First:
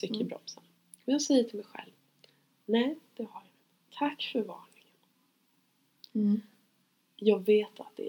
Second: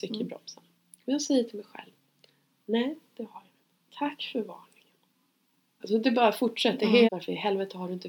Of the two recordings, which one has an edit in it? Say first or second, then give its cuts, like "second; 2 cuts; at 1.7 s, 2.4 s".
second; 2 cuts; at 5.8 s, 7.0 s